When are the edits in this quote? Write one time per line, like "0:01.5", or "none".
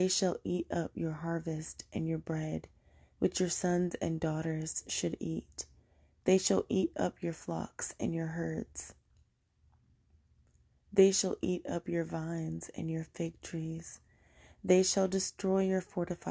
none